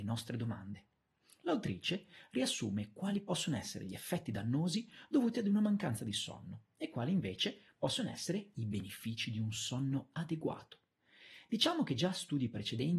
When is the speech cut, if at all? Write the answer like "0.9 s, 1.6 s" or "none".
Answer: none